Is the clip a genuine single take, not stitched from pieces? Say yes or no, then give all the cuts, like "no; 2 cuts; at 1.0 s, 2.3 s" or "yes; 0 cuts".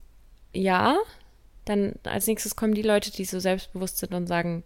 yes; 0 cuts